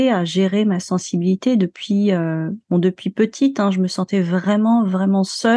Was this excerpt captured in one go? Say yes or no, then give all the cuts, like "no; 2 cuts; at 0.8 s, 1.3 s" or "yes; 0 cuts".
yes; 0 cuts